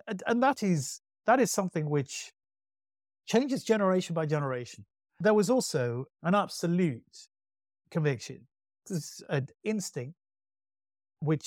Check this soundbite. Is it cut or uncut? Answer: uncut